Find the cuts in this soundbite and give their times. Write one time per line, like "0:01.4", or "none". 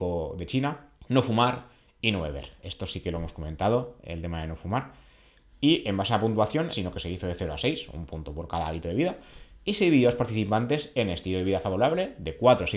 0:01.0
0:06.7